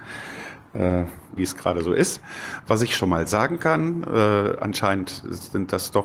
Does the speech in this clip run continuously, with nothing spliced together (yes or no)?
no